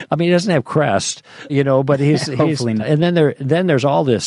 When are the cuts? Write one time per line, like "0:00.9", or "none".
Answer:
0:01.5
0:02.8